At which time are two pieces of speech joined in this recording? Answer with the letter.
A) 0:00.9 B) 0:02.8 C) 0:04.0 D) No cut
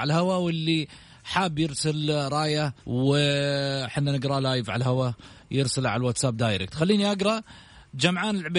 B